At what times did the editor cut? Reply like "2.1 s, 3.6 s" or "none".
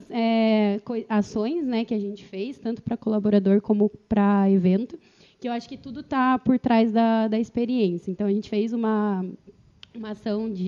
none

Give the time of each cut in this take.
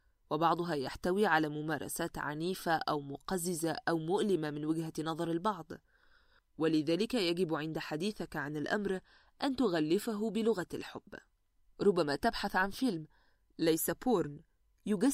11.7 s

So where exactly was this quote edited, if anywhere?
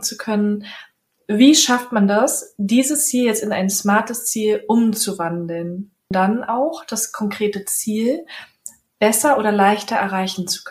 6.1 s

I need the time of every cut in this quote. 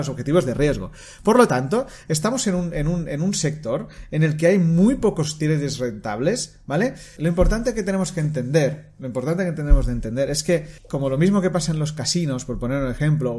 7.2 s, 10.8 s

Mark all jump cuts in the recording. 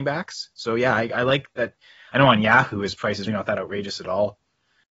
2.1 s, 3.3 s

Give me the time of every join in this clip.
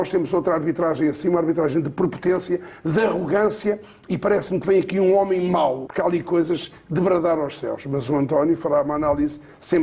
5.9 s

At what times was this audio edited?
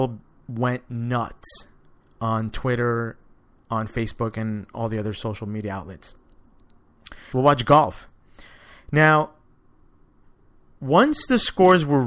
7.3 s

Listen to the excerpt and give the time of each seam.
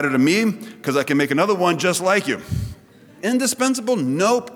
3.2 s

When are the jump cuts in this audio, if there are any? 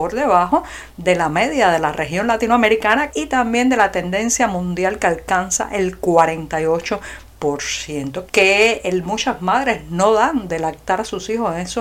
3.1 s, 8.3 s

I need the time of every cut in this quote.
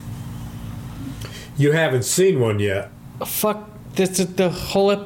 none

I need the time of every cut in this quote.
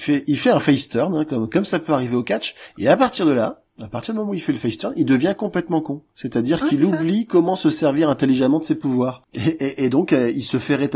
none

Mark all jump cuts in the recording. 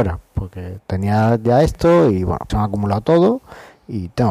2.5 s

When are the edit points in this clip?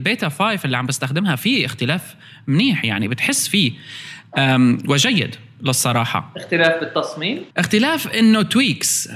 7.5 s

